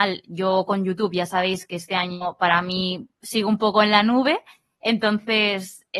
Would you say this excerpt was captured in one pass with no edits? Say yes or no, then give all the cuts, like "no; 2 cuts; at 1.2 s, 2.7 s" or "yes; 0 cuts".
yes; 0 cuts